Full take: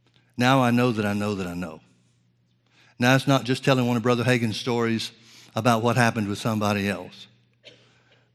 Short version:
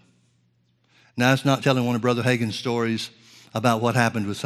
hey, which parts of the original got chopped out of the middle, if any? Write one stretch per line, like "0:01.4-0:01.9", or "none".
0:03.4-0:03.6